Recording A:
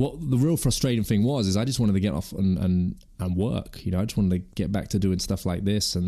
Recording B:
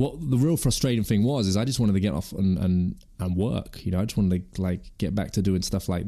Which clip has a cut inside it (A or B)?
A